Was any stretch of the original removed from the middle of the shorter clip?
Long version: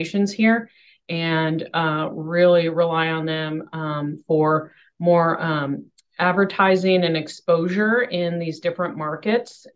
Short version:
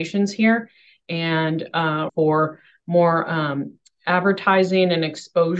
yes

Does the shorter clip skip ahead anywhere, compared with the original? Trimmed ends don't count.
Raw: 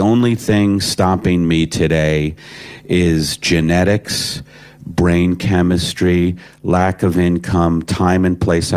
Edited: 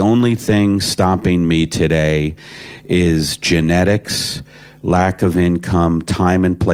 yes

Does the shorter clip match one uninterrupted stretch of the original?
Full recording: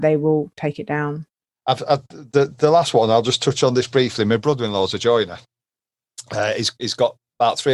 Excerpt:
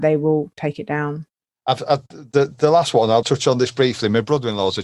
no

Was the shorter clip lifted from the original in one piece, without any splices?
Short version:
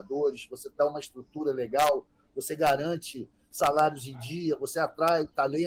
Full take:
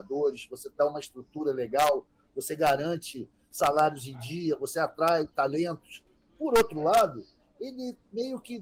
yes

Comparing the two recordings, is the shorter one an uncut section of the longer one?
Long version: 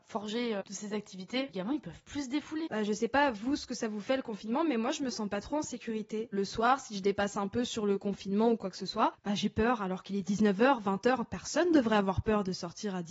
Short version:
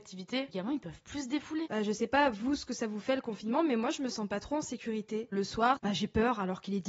no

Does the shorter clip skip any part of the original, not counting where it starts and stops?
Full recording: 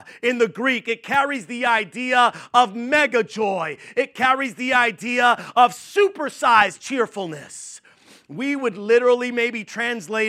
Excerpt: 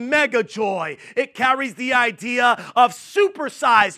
no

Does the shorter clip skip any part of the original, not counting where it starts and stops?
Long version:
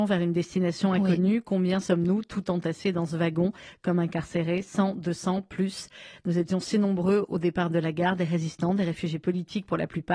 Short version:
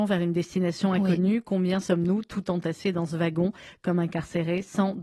no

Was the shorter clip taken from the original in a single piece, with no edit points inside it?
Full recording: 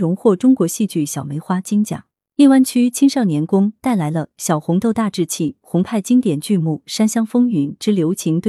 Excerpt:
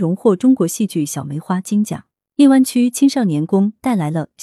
yes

